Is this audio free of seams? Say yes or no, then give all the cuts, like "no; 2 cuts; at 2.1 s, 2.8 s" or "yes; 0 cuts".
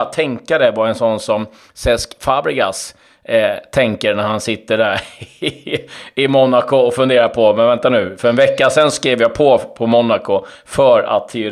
yes; 0 cuts